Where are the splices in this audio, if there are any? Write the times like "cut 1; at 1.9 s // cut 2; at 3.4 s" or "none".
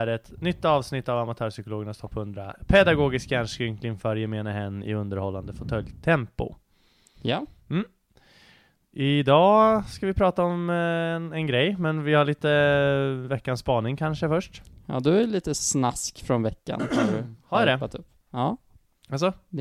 none